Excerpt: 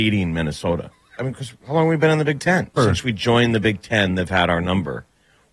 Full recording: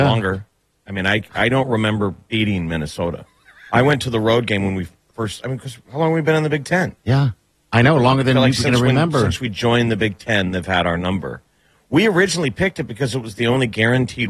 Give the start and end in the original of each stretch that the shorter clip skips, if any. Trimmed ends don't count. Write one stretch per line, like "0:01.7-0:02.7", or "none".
0:03.5-0:05.4
0:07.0-0:09.1